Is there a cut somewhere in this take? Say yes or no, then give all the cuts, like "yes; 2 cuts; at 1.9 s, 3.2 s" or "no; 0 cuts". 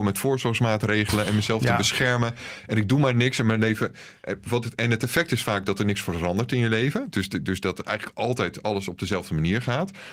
no; 0 cuts